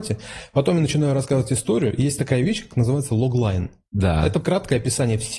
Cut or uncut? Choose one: cut